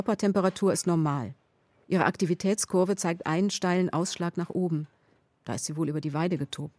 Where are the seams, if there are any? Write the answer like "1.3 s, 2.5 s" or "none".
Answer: none